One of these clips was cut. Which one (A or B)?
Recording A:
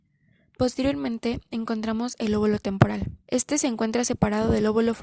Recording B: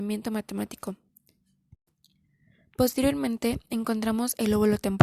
A